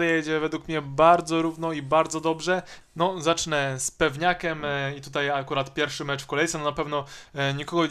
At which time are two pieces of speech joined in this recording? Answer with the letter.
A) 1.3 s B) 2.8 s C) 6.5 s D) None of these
B